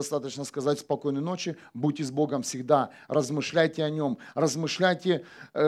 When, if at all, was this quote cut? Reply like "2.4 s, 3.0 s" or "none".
none